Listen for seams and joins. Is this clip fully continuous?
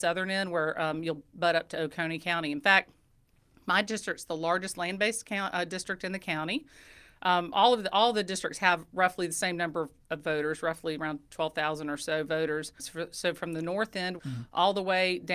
no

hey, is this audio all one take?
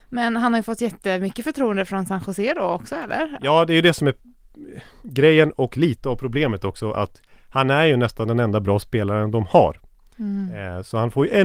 yes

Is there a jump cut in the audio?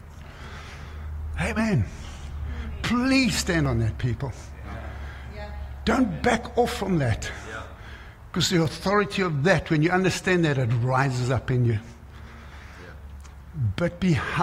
no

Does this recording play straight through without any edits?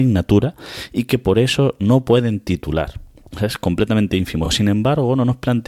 yes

